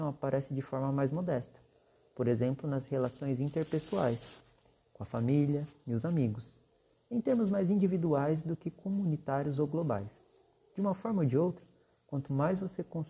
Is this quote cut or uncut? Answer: uncut